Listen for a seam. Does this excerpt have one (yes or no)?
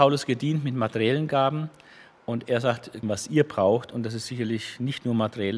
yes